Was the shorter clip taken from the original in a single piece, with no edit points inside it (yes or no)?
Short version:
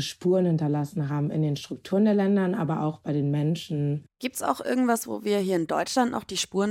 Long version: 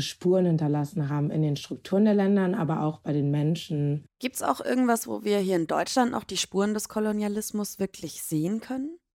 yes